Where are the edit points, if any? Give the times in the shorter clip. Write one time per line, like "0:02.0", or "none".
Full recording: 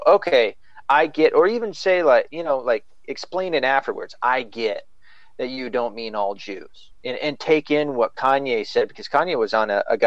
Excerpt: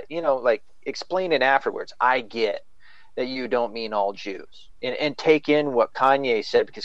none